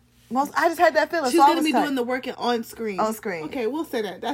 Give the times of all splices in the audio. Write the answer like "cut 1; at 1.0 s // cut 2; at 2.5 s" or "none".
cut 1; at 2.3 s